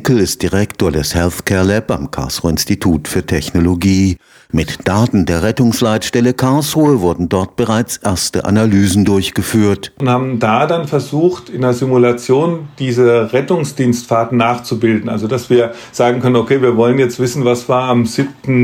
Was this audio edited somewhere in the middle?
no; 0 cuts

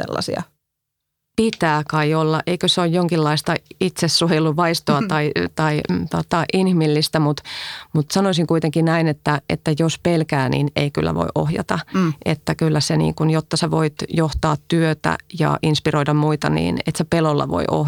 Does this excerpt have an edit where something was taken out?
no; 0 cuts

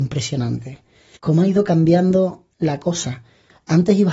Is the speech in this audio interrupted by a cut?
yes; 2 cuts; at 1.1 s, 2.5 s

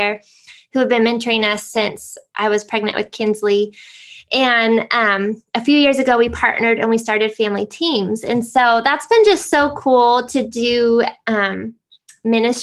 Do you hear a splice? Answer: no; 0 cuts

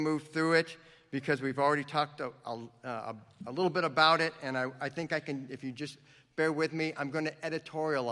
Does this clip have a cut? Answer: no; 0 cuts

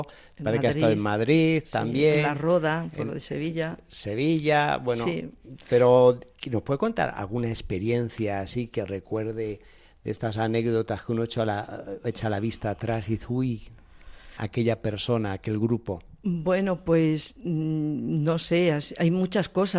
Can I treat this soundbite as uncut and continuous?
no; 1 cut; at 14.4 s

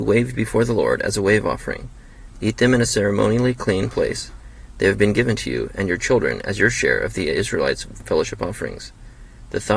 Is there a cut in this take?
yes; 1 cut; at 2.3 s

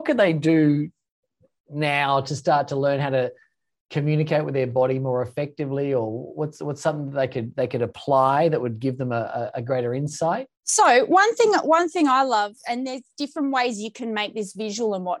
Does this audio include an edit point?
yes; 1 cut; at 10.5 s

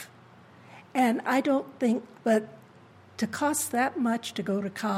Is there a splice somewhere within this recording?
yes; 1 cut; at 2.1 s

